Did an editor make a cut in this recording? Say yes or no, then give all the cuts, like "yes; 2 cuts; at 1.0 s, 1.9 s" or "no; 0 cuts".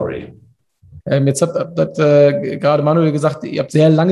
yes; 1 cut; at 1.0 s